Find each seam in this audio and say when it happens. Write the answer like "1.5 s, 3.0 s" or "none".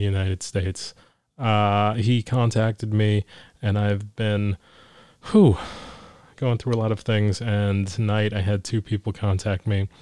none